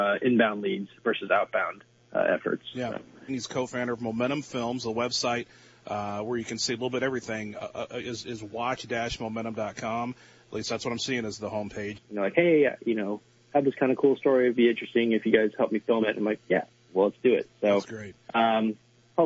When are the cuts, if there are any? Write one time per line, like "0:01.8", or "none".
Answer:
0:03.3
0:11.9